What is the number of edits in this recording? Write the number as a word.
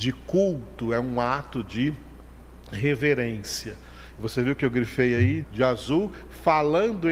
two